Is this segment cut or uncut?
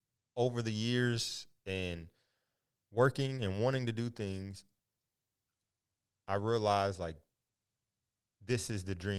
uncut